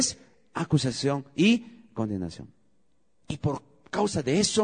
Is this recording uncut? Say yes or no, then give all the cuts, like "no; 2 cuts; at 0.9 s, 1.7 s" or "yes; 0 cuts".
no; 1 cut; at 3.2 s